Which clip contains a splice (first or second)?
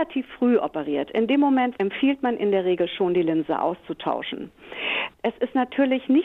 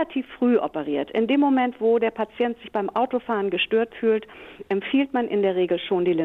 first